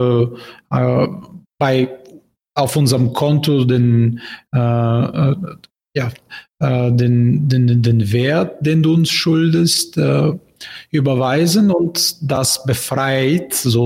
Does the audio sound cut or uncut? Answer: uncut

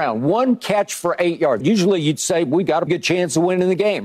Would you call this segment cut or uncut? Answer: cut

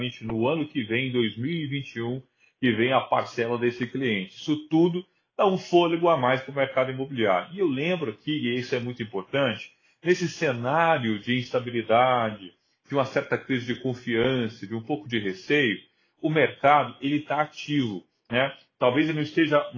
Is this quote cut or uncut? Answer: uncut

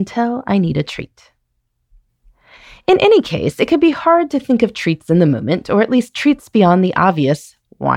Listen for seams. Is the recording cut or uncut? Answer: uncut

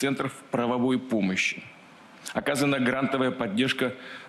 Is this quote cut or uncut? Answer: uncut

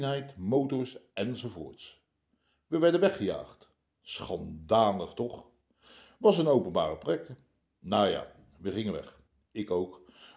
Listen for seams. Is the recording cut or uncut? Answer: uncut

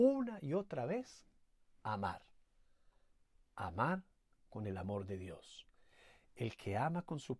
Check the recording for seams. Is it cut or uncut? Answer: uncut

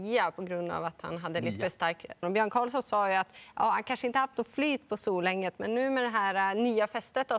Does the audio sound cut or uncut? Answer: cut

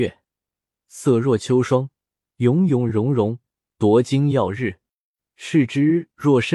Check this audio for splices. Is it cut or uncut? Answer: uncut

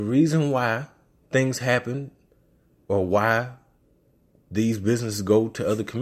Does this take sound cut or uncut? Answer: uncut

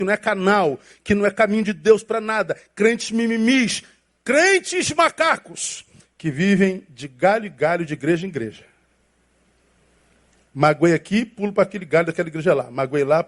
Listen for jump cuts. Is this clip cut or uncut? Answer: uncut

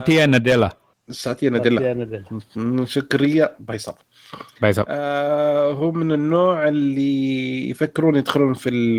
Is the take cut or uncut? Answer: uncut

